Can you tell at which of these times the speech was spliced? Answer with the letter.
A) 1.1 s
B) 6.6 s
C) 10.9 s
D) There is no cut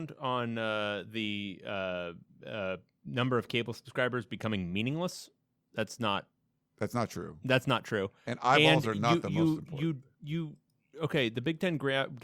C